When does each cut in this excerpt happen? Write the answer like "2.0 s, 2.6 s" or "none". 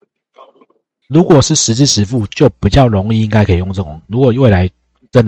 1.0 s